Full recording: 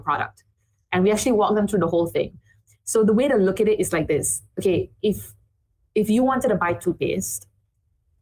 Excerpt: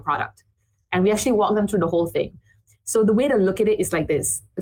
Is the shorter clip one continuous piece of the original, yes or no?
yes